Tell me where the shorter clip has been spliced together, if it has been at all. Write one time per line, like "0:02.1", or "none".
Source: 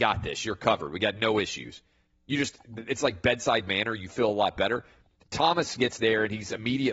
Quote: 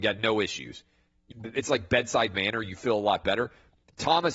0:01.3